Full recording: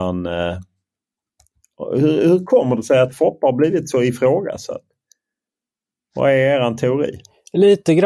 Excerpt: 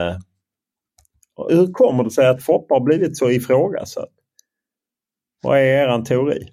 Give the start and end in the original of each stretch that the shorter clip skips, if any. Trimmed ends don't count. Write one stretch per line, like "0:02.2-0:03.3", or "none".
0:01.9-0:02.2